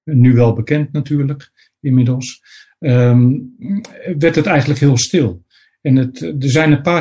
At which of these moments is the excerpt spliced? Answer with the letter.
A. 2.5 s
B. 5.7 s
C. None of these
C